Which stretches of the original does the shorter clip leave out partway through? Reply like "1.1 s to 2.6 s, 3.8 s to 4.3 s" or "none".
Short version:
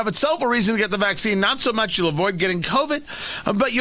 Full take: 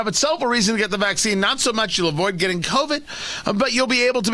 none